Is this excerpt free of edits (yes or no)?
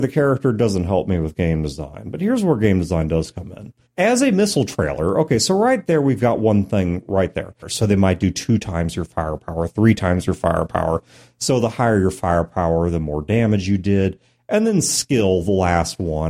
no